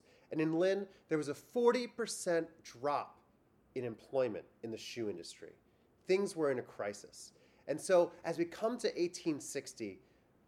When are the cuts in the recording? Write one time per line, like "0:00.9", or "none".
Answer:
none